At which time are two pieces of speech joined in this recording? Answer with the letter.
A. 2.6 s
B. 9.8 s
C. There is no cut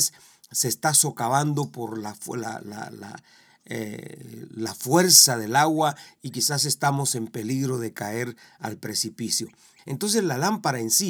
B